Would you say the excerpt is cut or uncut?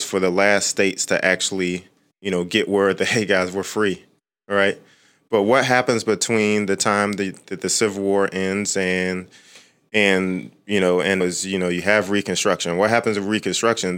cut